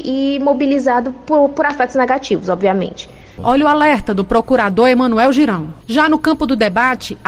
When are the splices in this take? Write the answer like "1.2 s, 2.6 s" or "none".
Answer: 3.4 s, 5.8 s

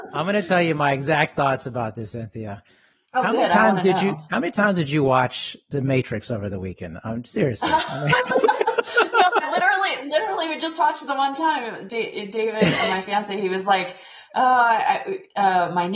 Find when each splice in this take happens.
none

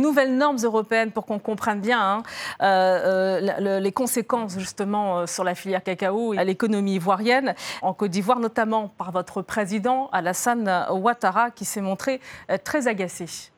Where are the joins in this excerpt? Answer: 6.4 s, 7.8 s

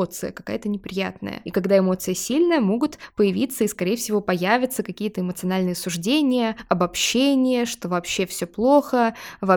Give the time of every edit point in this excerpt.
none

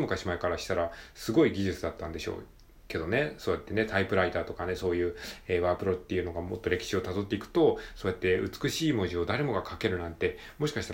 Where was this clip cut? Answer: none

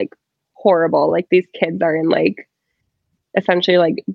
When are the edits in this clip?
none

